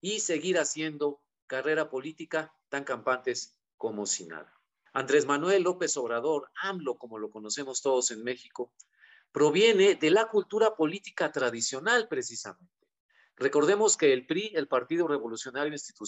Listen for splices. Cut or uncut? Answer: cut